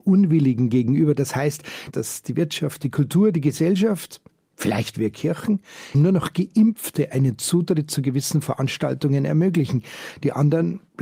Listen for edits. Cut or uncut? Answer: cut